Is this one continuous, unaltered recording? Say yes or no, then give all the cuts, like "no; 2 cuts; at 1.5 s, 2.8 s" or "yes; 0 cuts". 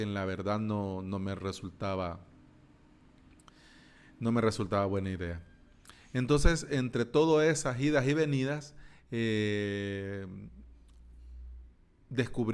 yes; 0 cuts